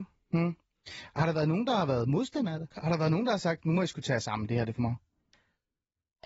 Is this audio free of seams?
no; 1 cut; at 2.7 s

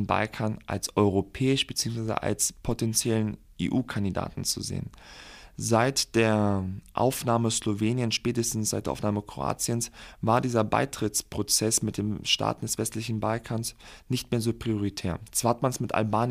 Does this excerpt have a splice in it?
no; 0 cuts

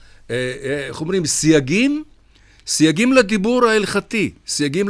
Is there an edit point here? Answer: no; 0 cuts

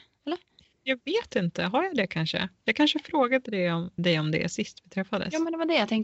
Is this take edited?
yes; 1 cut; at 4.0 s

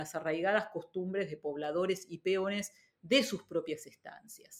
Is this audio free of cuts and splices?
yes; 0 cuts

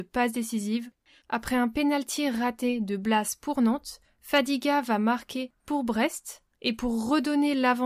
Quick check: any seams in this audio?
yes; 2 cuts; at 1.1 s, 6.5 s

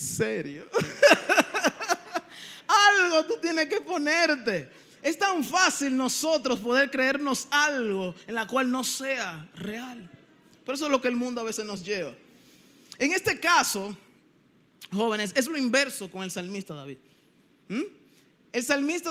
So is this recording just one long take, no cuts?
yes; 0 cuts

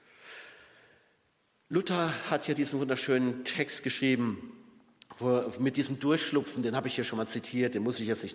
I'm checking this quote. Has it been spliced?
no; 0 cuts

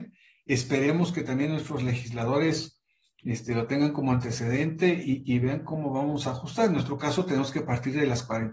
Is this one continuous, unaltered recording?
yes; 0 cuts

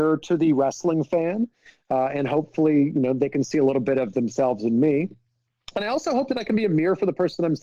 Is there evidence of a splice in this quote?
no; 0 cuts

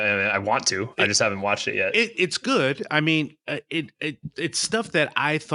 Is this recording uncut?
yes; 0 cuts

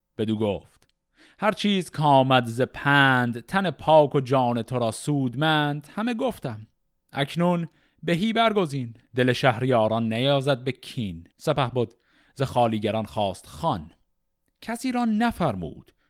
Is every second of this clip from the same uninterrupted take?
no; 2 cuts; at 9.0 s, 11.3 s

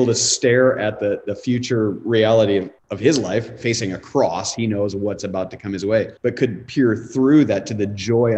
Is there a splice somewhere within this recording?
yes; 2 cuts; at 2.8 s, 6.2 s

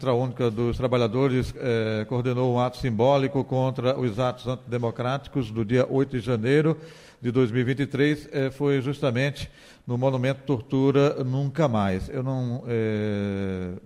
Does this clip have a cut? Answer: no; 0 cuts

